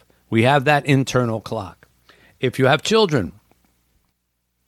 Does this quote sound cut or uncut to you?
uncut